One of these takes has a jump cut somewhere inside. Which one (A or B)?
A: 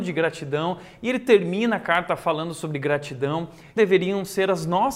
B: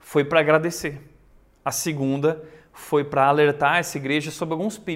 A